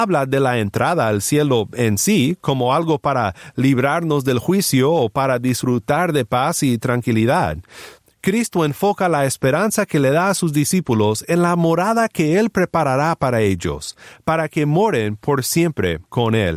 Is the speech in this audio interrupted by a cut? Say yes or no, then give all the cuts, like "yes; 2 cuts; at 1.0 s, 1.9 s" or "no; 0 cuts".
yes; 1 cut; at 8.0 s